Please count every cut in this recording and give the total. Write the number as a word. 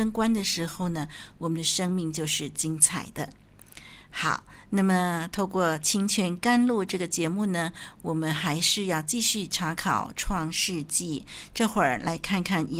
zero